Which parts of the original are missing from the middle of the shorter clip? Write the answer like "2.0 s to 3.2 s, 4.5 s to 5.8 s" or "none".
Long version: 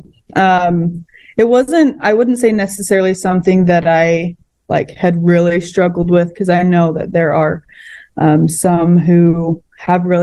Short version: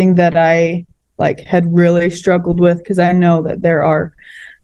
none